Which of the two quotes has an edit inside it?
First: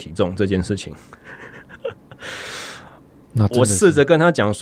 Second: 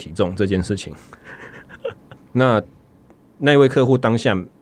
second; 1 cut; at 2.2 s

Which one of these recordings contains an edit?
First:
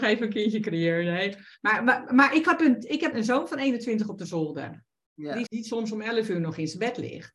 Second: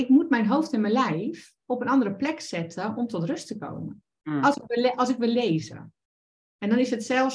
first; 2 cuts; at 3.1 s, 5.5 s

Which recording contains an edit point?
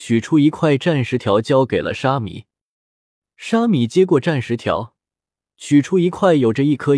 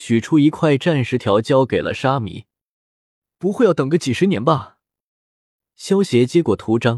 second; 1 cut; at 3.3 s

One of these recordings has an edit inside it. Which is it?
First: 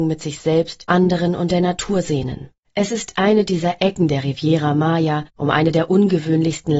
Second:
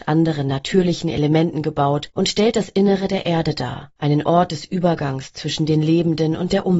first; 1 cut; at 5.3 s

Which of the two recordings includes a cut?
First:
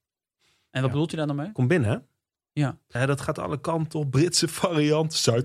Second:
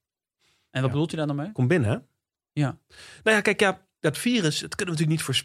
first; 1 cut; at 3.0 s

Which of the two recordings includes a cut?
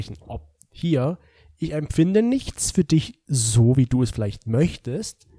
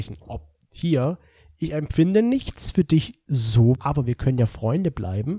second; 1 cut; at 3.8 s

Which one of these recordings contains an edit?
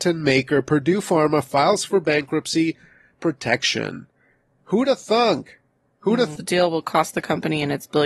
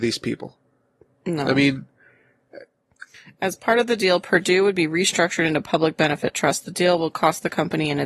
first; 1 cut; at 6.4 s

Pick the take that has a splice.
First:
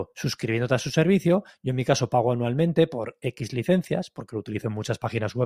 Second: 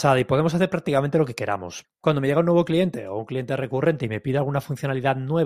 second; 1 cut; at 1.8 s

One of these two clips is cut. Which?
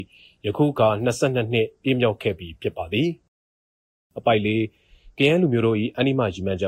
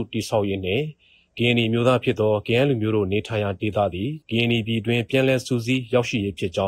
second; 1 cut; at 4.2 s

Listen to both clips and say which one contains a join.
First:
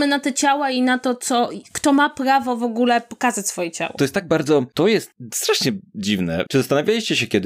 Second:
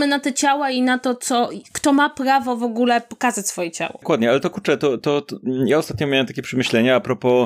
first; 2 cuts; at 4.0 s, 6.5 s

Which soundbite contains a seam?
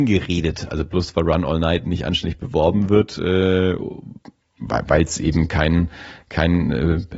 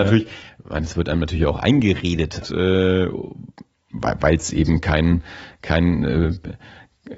second; 1 cut; at 2.4 s

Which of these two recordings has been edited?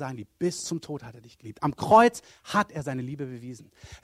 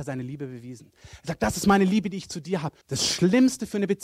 second; 1 cut; at 2.8 s

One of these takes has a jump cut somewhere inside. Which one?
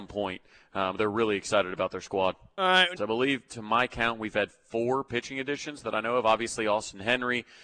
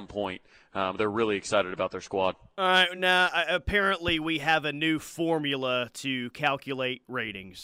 first; 1 cut; at 3.0 s

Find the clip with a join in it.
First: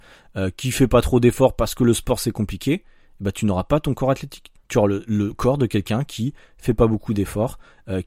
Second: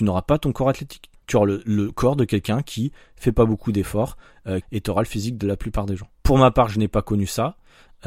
second; 2 cuts; at 4.6 s, 6.1 s

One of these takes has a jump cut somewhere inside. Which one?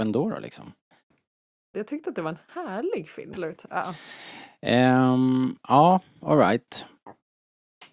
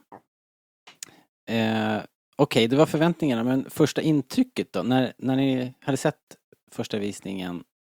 first; 2 cuts; at 1.7 s, 3.3 s

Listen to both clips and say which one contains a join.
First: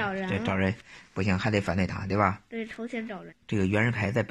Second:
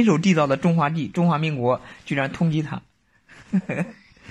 first; 1 cut; at 3.3 s

